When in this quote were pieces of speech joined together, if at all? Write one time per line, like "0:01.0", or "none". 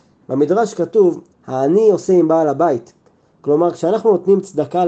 0:01.3